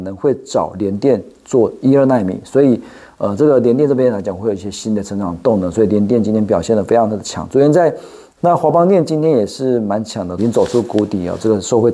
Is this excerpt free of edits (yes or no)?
no